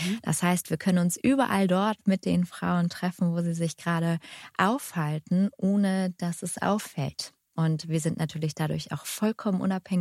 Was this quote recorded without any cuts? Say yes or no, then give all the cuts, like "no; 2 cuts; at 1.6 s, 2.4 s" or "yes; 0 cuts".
yes; 0 cuts